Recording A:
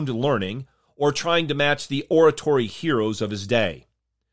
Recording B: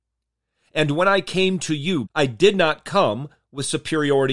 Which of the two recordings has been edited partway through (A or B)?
B